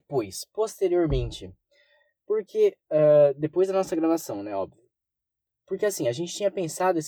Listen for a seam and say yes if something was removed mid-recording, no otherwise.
no